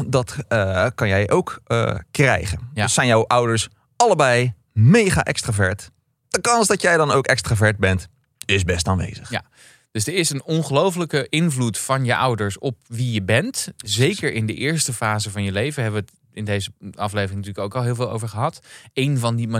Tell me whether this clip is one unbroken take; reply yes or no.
yes